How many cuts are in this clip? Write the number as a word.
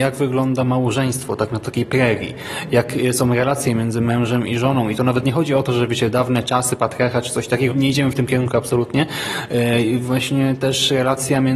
one